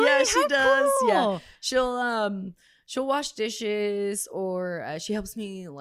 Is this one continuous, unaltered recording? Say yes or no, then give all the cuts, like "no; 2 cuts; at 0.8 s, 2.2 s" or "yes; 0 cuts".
yes; 0 cuts